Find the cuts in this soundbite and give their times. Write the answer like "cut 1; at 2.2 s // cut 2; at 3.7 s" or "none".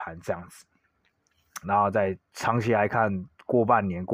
cut 1; at 1.6 s